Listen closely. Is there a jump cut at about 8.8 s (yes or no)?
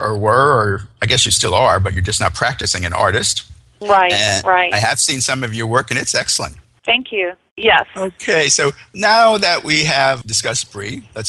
no